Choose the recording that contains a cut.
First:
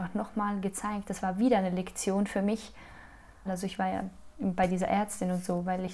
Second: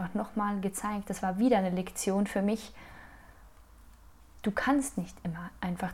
first; 1 cut; at 3.5 s

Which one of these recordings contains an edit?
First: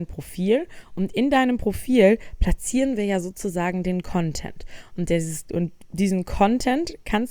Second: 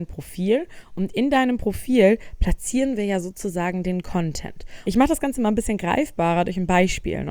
second; 1 cut; at 4.8 s

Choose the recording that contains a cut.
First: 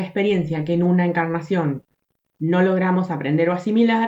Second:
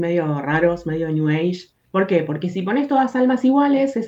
second; 1 cut; at 1.8 s

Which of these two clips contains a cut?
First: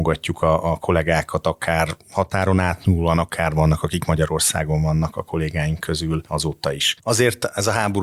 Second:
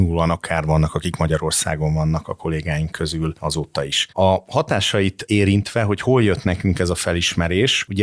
first; 1 cut; at 7.0 s

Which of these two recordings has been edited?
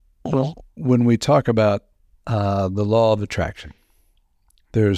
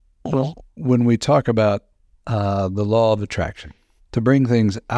second; 1 cut; at 4.0 s

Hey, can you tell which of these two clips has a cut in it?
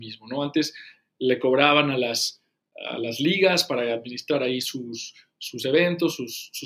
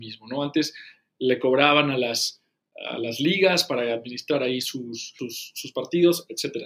second; 1 cut; at 5.2 s

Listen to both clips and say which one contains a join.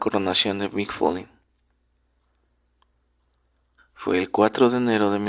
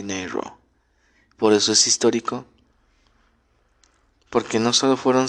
first; 1 cut; at 3.8 s

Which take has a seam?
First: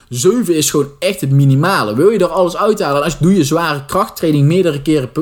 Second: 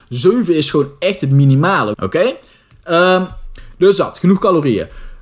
second; 1 cut; at 1.9 s

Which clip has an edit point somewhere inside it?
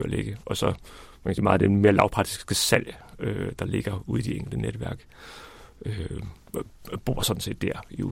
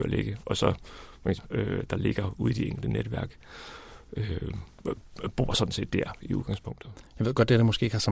second; 1 cut; at 1.4 s

